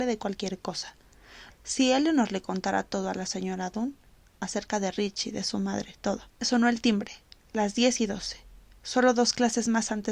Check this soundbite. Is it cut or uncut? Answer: cut